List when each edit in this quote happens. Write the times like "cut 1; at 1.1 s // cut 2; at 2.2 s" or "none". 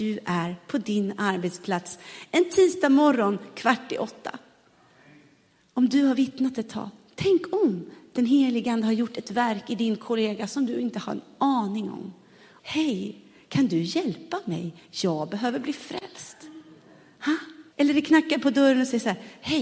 cut 1; at 12.6 s // cut 2; at 17.7 s